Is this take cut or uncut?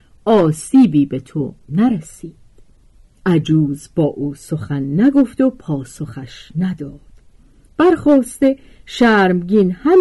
uncut